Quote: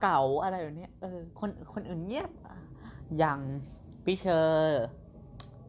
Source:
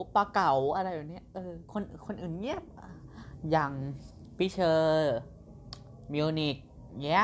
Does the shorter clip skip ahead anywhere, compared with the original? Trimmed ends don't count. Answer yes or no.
no